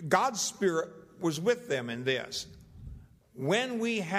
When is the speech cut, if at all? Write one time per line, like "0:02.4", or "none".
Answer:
0:03.2